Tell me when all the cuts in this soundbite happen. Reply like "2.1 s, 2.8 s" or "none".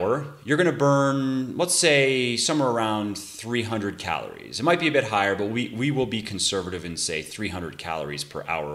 none